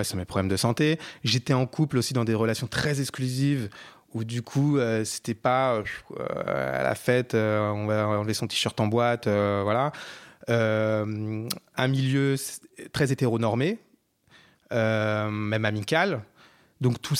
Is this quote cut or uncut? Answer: uncut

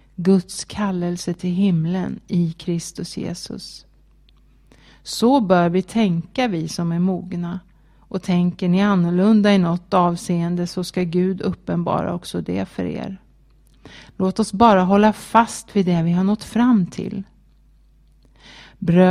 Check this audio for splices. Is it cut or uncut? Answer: uncut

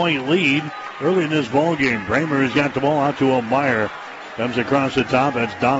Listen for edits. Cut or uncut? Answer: uncut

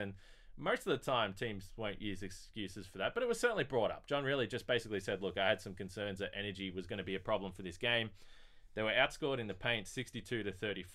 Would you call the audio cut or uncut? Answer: uncut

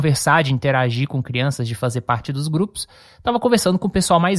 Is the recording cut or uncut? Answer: uncut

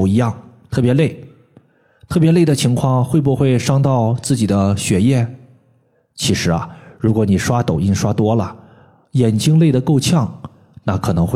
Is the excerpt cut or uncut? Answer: uncut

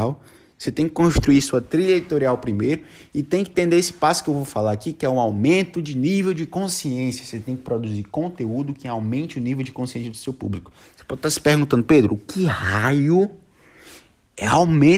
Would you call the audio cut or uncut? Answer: uncut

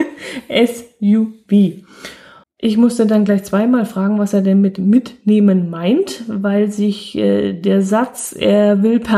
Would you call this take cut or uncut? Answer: cut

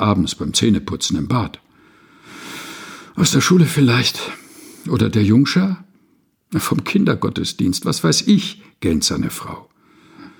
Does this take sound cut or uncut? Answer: uncut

